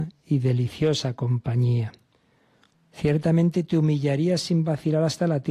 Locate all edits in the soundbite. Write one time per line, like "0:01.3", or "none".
0:02.7